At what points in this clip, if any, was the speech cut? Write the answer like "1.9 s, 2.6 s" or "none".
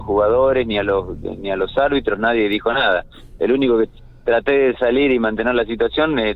none